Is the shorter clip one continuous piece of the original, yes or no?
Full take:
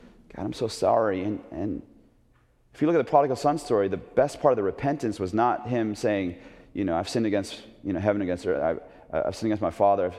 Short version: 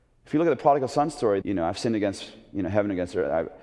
no